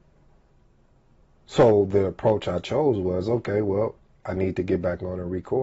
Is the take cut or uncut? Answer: uncut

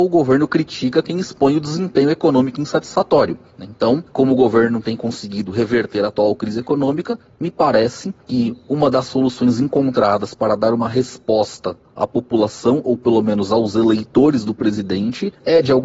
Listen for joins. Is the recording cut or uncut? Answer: uncut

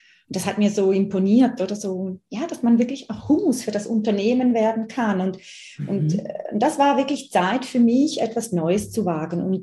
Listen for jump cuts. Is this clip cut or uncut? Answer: uncut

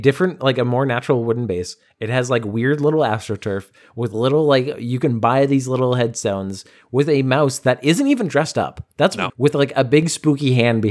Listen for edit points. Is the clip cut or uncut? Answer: cut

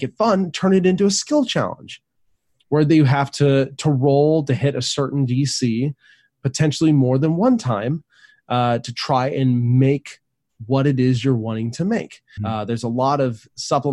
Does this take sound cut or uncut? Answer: cut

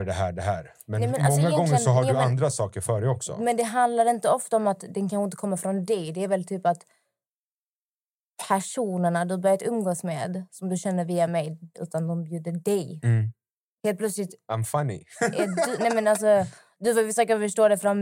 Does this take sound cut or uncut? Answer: cut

